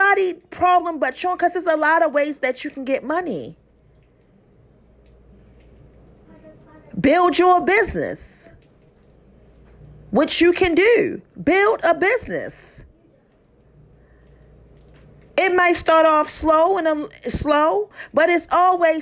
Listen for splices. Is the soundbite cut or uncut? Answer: uncut